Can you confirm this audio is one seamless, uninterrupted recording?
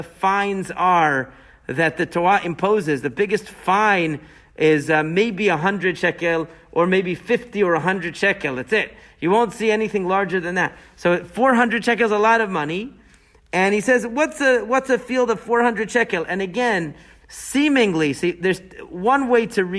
yes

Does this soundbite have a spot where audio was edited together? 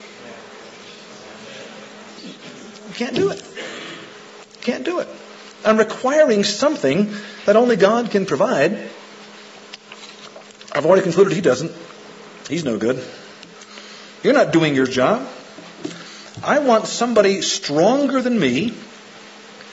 no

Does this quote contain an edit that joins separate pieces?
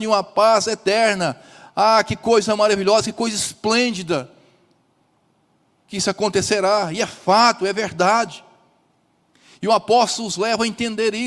no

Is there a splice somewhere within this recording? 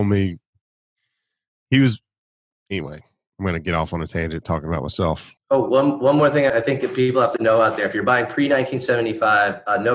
yes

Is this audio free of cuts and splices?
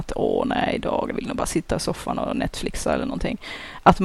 no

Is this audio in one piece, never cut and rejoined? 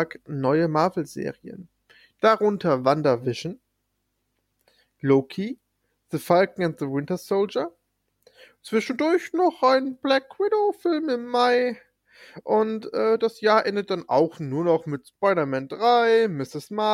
yes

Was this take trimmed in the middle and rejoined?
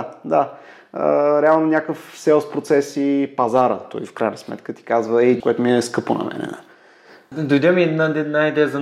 yes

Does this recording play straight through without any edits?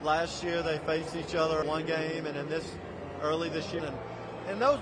no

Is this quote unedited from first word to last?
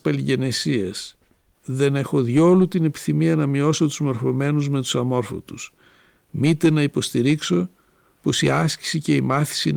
no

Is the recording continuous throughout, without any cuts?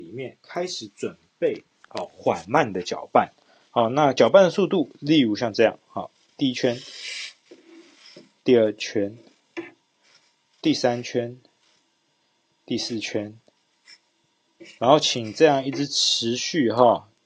no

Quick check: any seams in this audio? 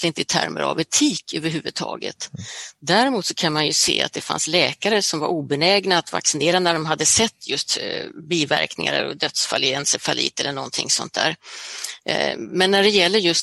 no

